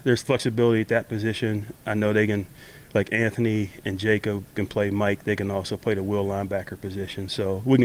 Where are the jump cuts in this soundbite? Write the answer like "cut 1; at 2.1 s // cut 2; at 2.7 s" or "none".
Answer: none